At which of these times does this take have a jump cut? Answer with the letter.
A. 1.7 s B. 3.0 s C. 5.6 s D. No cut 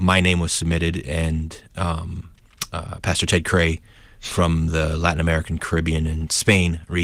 D